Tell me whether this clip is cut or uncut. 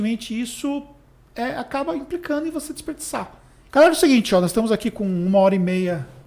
cut